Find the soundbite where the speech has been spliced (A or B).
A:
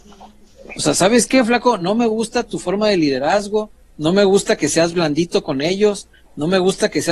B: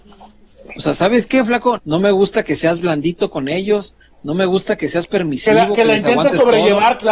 B